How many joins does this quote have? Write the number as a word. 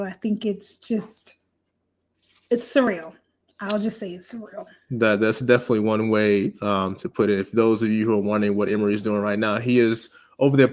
zero